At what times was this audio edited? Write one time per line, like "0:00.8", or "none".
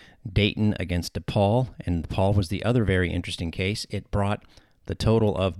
none